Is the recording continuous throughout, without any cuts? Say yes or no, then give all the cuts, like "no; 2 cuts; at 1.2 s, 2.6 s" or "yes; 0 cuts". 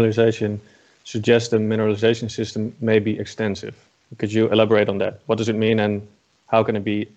yes; 0 cuts